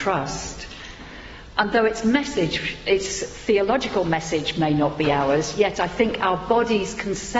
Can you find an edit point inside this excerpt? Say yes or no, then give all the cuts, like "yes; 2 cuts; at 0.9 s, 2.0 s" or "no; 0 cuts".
no; 0 cuts